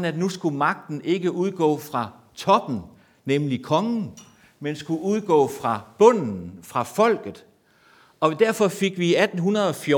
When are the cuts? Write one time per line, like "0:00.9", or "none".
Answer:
none